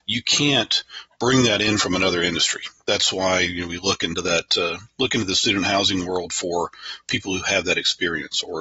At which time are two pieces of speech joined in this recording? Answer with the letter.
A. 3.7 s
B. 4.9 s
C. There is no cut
C